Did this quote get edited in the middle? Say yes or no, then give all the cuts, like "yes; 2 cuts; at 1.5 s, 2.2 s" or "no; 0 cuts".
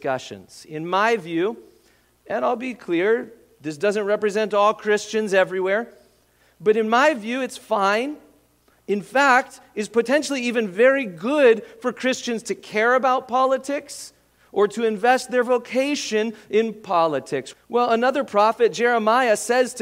yes; 1 cut; at 17.5 s